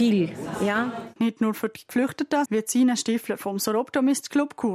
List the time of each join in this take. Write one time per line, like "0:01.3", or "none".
0:01.2
0:02.5

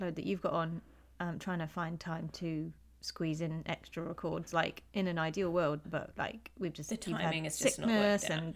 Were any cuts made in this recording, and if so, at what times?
0:05.8

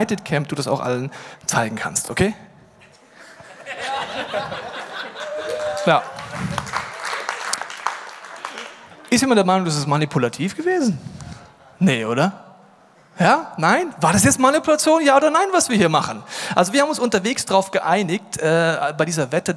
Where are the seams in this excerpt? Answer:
none

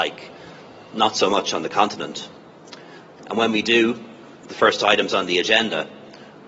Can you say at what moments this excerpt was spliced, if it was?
0:03.2

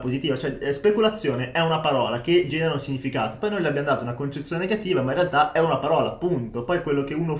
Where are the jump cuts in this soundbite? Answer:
none

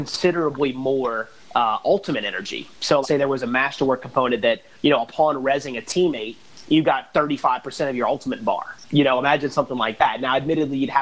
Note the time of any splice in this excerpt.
0:03.0

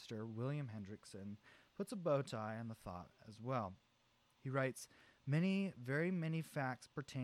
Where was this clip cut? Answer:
none

